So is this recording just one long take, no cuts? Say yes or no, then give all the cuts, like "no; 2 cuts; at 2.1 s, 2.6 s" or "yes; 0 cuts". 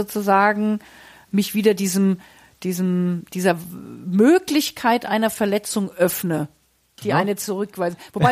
no; 1 cut; at 7.0 s